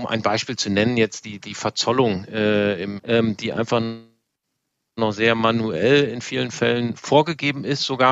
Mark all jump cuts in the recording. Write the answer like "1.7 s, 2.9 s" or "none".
3.0 s